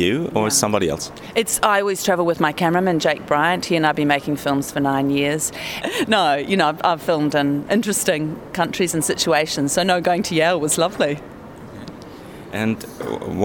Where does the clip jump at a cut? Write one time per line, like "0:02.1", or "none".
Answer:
0:05.8
0:07.7